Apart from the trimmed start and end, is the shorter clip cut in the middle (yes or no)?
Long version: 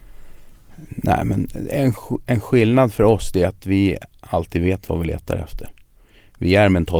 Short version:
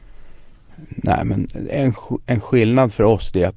no